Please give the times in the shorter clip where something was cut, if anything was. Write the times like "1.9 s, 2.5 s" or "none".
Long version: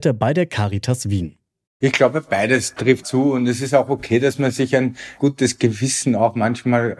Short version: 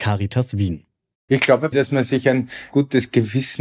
1.7 s

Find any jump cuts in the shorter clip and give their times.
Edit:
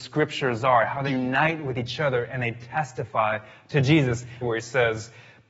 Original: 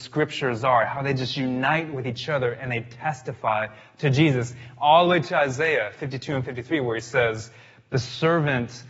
1.1 s, 4.4 s

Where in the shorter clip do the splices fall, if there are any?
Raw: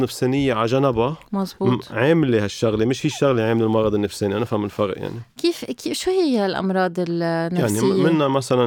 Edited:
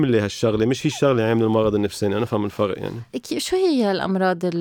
3.1 s

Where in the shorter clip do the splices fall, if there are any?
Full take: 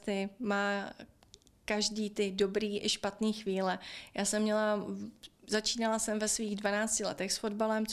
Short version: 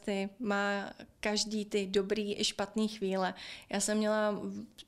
1.1 s

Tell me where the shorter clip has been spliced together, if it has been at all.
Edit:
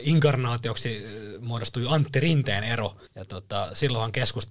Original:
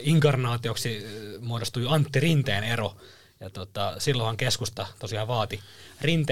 3.1 s

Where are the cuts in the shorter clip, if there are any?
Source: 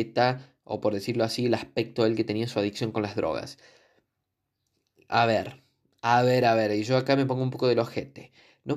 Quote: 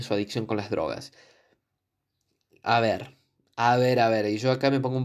none

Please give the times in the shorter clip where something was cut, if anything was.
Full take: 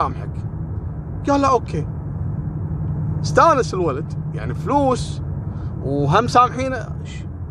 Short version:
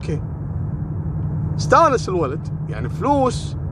none

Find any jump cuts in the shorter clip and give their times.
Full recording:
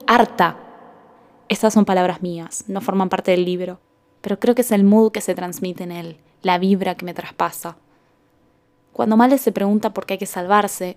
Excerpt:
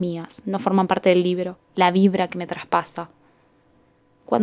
1.7 s

